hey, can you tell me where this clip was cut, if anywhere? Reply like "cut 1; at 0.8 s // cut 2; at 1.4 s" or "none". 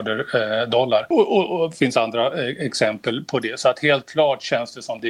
none